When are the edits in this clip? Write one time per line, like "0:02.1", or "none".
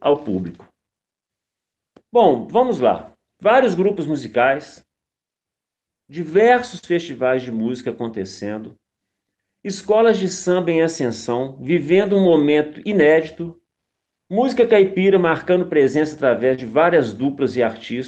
none